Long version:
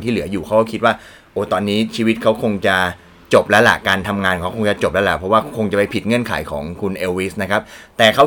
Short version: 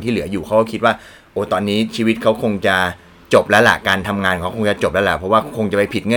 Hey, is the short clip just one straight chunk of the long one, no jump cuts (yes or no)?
yes